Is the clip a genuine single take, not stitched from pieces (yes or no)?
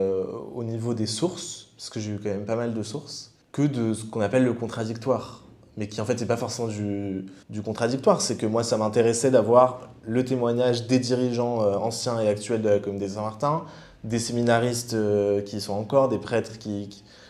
no